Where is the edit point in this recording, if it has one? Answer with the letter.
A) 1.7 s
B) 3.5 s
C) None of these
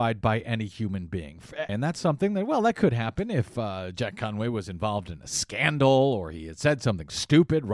A